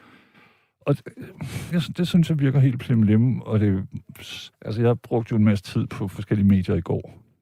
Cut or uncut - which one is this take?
cut